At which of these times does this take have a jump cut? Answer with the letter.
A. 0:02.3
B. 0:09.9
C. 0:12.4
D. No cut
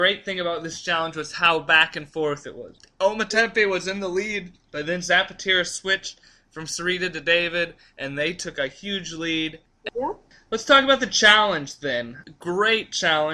B